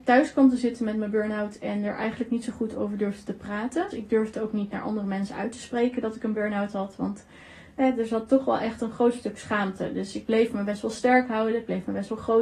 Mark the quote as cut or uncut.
cut